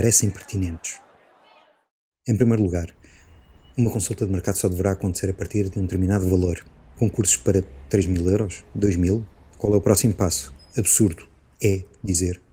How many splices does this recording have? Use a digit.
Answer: 1